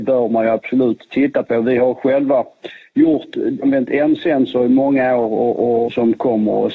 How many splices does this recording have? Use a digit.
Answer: 2